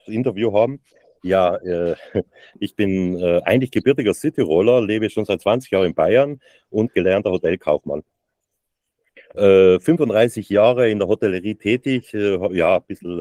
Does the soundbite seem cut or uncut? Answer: uncut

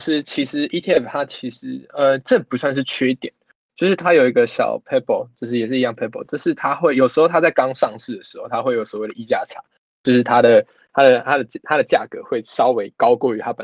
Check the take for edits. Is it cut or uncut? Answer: uncut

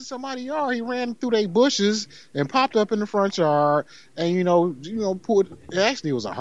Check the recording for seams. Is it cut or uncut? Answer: uncut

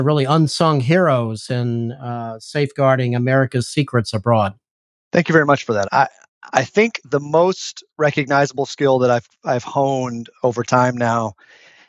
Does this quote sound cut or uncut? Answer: cut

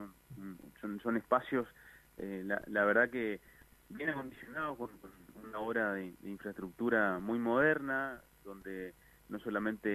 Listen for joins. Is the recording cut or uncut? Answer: uncut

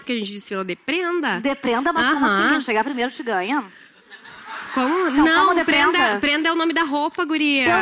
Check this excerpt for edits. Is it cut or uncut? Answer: uncut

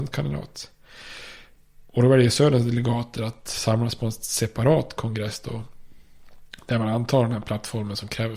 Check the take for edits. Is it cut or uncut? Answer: uncut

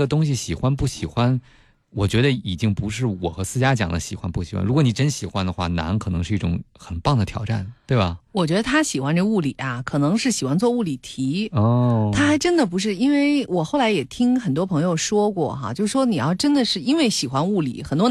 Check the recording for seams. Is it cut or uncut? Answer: uncut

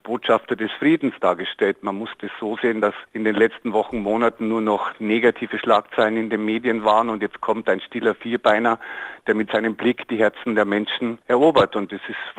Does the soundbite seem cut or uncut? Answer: uncut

